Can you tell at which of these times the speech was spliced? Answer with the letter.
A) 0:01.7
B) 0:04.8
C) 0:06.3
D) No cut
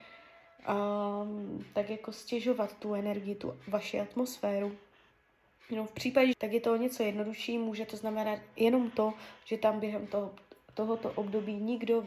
C